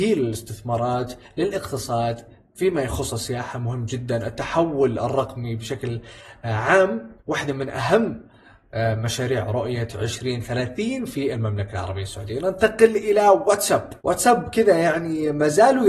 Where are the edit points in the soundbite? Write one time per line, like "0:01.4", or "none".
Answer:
0:07.2
0:14.0